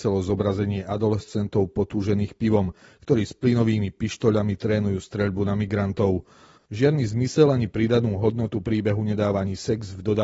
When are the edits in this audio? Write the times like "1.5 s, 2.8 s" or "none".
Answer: 6.6 s